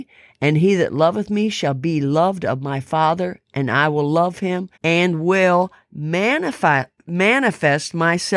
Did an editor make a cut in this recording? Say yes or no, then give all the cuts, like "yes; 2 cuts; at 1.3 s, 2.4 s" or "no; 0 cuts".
yes; 1 cut; at 4.7 s